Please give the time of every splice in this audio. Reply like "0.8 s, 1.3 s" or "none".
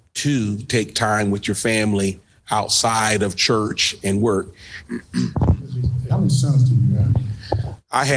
4.8 s, 6.1 s